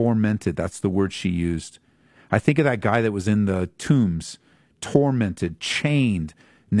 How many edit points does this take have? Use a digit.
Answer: 0